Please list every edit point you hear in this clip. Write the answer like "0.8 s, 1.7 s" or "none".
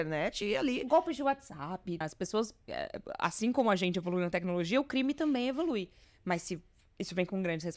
2.0 s, 6.0 s